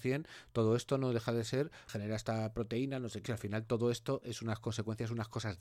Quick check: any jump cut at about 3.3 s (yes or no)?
yes